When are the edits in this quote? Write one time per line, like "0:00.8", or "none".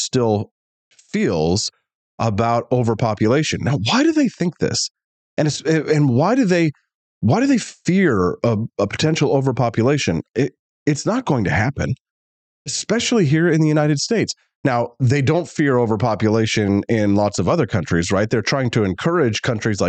none